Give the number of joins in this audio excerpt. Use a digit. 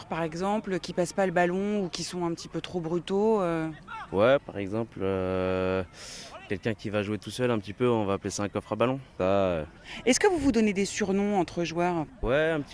1